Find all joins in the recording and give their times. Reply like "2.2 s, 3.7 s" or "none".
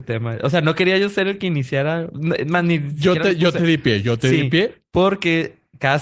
none